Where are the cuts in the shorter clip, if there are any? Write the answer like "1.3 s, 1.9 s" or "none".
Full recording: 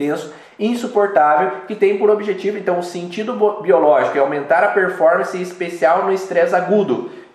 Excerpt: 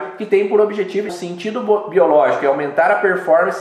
1.1 s